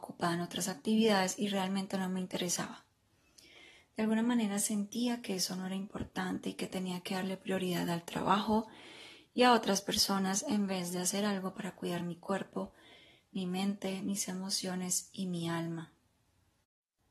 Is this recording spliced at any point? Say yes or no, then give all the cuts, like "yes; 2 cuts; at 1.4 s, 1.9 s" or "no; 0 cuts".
no; 0 cuts